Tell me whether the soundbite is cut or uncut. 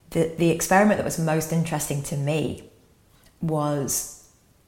uncut